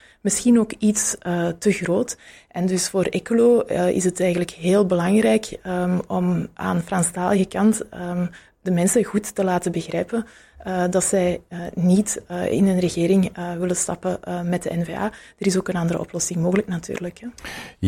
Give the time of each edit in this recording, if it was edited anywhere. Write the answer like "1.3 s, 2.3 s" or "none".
none